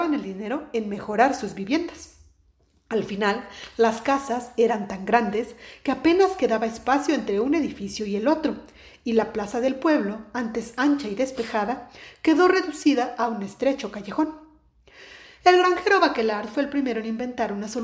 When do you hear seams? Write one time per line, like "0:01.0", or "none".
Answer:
none